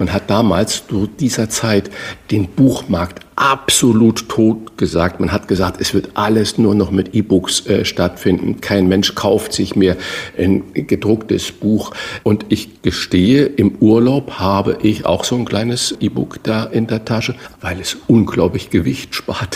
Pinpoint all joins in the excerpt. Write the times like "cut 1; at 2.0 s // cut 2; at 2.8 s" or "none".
cut 1; at 12.2 s // cut 2; at 17.5 s